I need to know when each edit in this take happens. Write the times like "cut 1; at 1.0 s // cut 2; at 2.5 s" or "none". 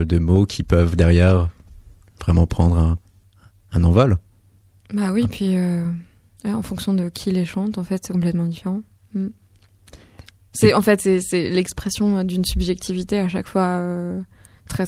cut 1; at 11.0 s